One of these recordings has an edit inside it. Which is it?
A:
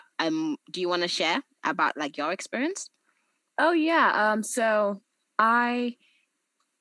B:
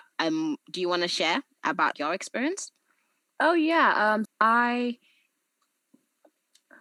B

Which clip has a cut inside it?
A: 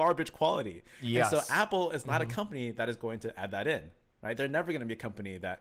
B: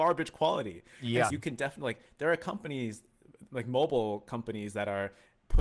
B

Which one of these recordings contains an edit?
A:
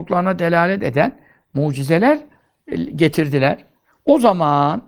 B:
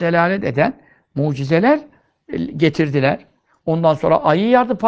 B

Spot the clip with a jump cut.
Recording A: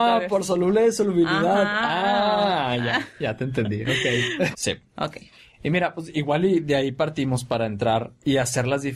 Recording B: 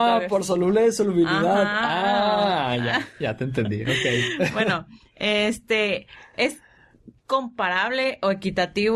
A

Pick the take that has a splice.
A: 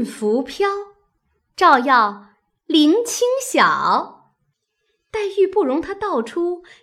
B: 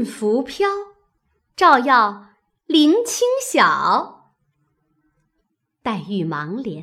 A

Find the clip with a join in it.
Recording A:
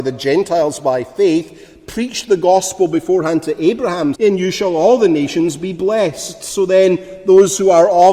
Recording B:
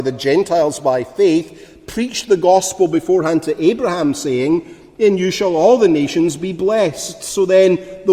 A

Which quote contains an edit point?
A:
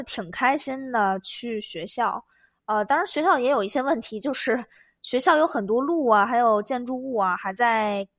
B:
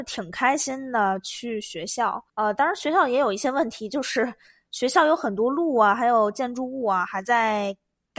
B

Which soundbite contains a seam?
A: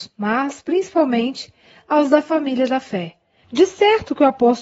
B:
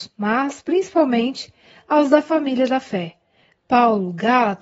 A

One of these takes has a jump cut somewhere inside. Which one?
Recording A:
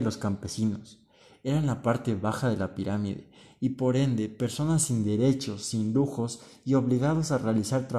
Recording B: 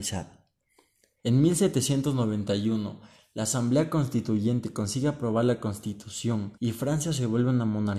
B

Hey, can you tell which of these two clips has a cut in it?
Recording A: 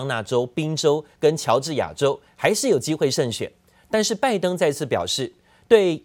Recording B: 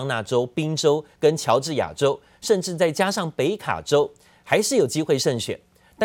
A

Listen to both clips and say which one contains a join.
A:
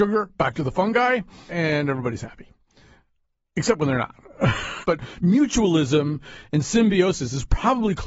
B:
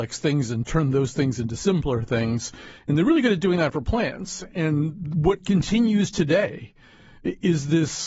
A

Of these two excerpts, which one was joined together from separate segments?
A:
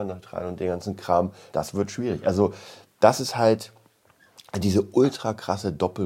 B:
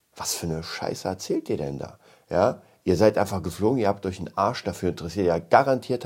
A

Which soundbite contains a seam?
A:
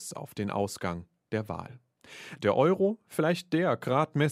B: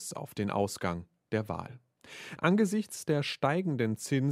B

